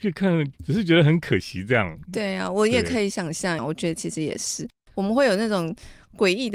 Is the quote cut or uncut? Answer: cut